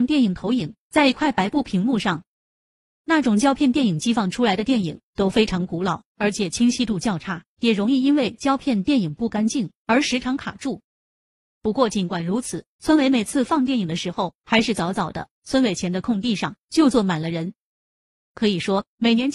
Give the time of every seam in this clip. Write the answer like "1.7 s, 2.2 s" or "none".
none

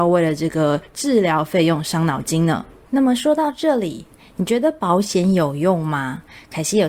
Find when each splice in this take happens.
none

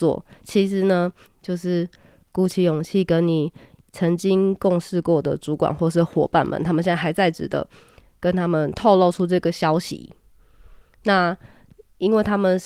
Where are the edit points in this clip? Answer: 1.3 s

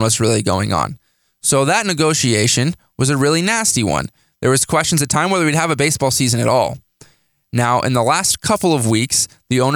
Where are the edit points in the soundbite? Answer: none

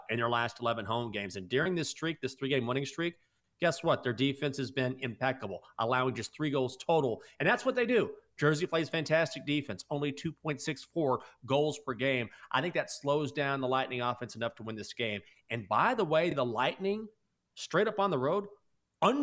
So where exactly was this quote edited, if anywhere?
none

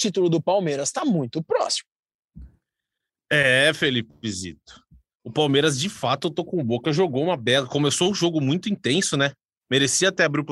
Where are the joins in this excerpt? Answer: none

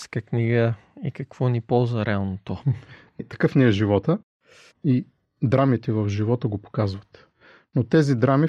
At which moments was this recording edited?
2.6 s, 4.7 s

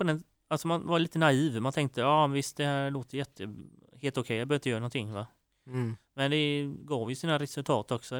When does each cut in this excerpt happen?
none

